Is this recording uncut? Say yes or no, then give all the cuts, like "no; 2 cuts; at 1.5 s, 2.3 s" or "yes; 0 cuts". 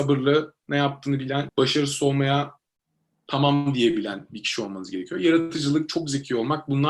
no; 1 cut; at 1.5 s